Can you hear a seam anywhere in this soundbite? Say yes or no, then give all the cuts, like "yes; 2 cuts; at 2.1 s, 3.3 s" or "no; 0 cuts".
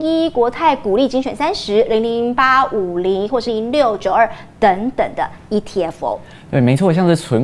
yes; 1 cut; at 3.5 s